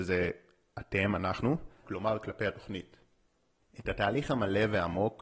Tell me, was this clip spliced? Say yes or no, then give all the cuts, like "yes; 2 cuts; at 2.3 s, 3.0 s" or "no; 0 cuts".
yes; 2 cuts; at 1.8 s, 3.6 s